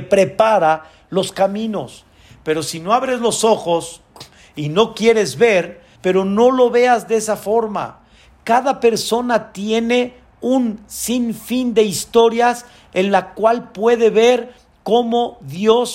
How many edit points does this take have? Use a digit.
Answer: 1